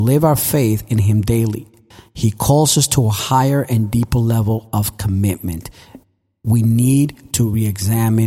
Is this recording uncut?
yes; 0 cuts

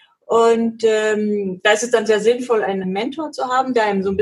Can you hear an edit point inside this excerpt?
yes; 1 cut; at 2.8 s

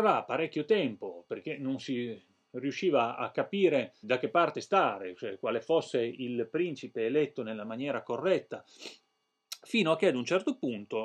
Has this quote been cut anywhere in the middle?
yes; 1 cut; at 4.0 s

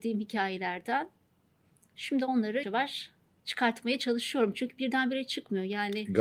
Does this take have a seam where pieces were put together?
yes; 1 cut; at 2.6 s

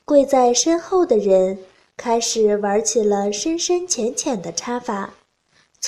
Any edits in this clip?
no; 0 cuts

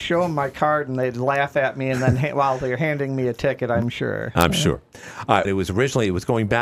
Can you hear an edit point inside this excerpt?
yes; 1 cut; at 5.4 s

